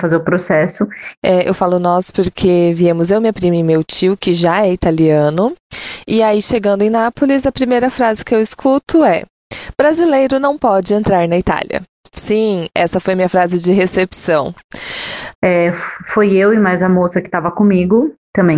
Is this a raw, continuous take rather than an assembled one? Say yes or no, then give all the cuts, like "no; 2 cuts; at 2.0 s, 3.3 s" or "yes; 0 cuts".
no; 2 cuts; at 1.2 s, 15.3 s